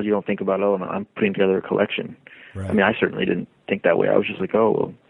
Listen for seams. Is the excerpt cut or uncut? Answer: uncut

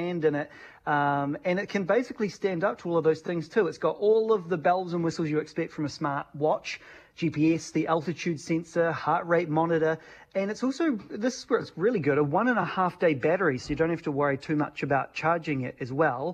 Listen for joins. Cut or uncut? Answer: uncut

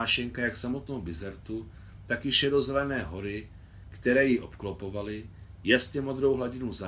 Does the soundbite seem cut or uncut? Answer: uncut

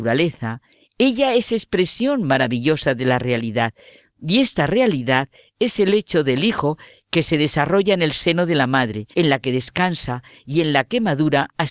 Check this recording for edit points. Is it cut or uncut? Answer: cut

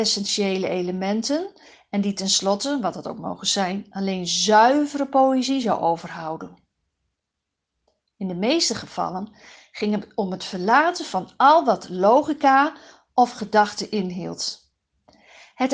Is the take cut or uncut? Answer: uncut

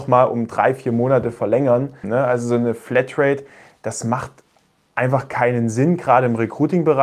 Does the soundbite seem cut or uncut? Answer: cut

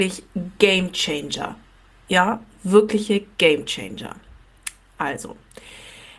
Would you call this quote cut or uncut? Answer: uncut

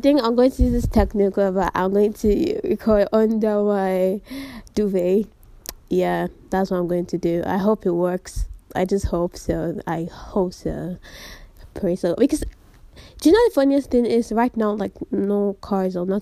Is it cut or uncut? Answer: uncut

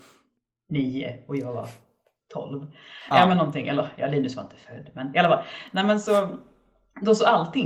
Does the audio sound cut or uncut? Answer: uncut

